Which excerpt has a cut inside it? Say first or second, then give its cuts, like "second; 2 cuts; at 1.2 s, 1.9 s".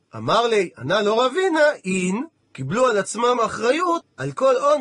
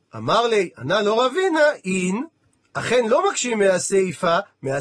first; 1 cut; at 2.4 s